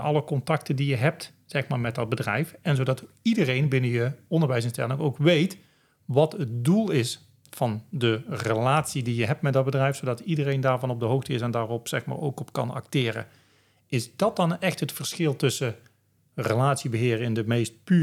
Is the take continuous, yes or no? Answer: yes